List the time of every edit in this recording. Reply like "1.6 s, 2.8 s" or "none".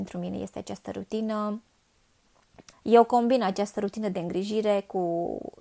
2.7 s